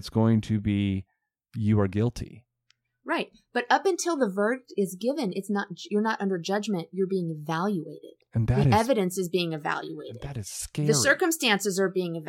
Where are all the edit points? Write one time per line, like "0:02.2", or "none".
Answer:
none